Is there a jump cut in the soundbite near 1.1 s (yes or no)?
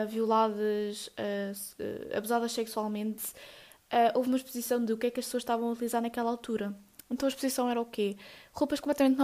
no